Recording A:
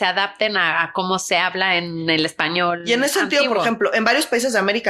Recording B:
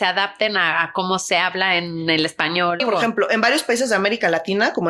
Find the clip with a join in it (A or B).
B